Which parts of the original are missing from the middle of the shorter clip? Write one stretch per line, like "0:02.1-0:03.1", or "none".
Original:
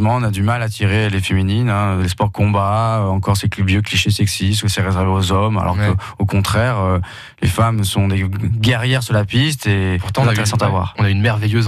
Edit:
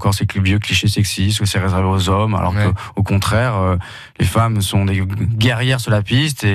none